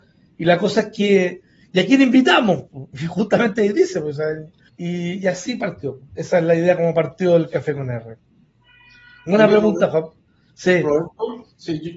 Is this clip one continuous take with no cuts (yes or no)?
no